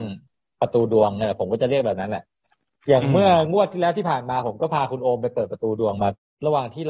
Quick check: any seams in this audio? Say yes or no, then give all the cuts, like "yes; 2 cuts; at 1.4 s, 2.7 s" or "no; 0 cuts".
no; 0 cuts